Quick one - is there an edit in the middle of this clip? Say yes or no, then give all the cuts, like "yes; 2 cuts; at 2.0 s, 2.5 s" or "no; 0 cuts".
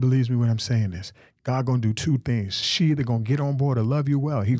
no; 0 cuts